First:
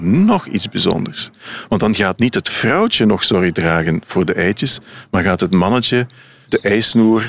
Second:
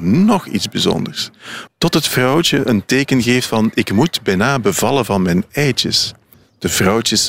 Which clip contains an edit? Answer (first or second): second